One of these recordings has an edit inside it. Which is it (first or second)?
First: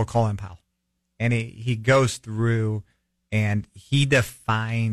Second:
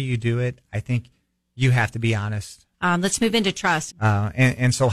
second